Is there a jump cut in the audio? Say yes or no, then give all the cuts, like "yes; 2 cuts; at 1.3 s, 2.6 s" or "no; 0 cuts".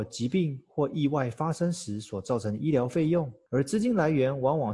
yes; 1 cut; at 3.5 s